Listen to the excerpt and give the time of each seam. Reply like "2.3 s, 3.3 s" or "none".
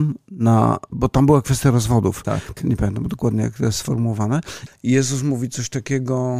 2.6 s, 4.7 s